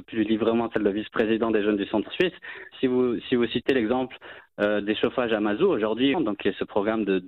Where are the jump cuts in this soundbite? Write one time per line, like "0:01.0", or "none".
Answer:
0:02.7
0:06.1